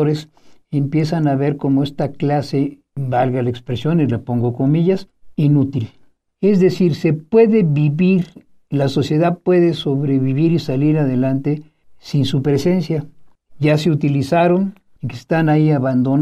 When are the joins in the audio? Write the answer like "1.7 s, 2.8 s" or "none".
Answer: 15.0 s